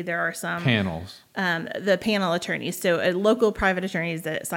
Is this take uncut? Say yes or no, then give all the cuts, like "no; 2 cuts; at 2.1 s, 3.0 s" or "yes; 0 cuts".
yes; 0 cuts